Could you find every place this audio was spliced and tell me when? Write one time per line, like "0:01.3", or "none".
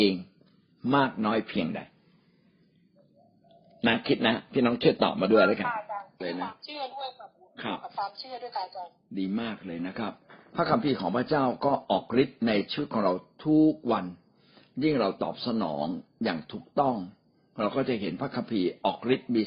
none